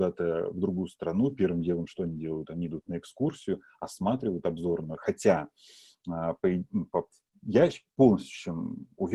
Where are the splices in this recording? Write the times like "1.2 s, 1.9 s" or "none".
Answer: none